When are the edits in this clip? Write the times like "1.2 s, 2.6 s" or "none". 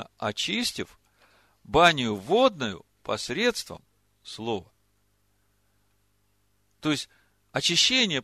none